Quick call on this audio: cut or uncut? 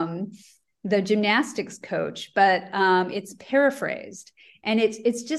uncut